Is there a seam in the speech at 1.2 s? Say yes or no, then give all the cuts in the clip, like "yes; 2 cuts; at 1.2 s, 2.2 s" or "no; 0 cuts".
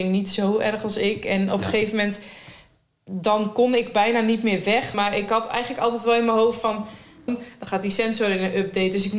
no; 2 cuts; at 4.9 s, 7.3 s